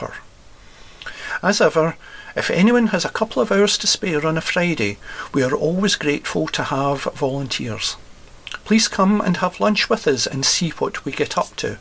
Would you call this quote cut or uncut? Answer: uncut